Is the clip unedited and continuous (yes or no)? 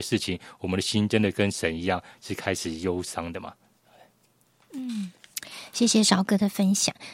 yes